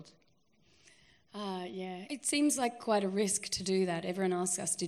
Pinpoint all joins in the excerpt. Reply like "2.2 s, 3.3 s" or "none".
2.1 s